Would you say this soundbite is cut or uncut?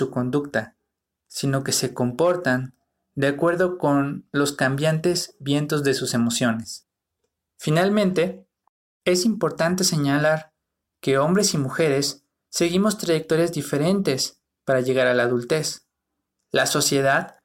uncut